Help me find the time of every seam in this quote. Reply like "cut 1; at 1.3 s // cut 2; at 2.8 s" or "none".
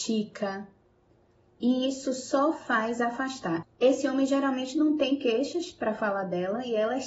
cut 1; at 3.6 s